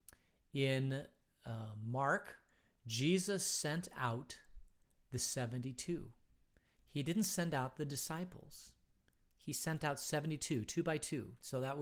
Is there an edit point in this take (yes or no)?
no